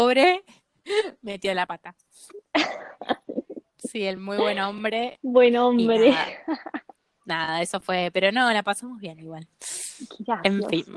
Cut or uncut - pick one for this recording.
uncut